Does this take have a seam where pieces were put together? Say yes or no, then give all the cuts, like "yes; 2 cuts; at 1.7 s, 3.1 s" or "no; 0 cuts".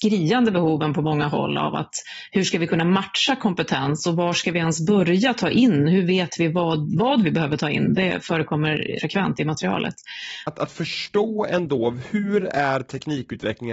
yes; 2 cuts; at 9.0 s, 10.5 s